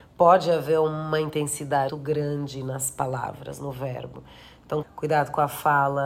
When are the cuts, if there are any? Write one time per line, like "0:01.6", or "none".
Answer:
0:01.9
0:04.8